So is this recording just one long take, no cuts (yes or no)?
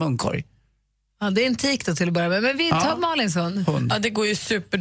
yes